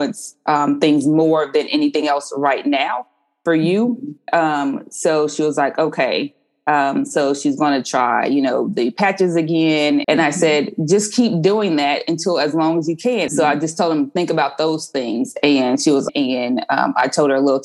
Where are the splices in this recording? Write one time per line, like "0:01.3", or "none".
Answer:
0:10.0
0:13.3
0:16.1